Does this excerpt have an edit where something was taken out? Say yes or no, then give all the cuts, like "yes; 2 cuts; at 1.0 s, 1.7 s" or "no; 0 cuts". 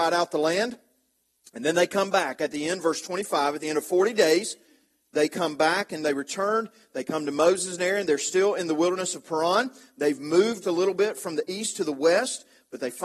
yes; 1 cut; at 10.6 s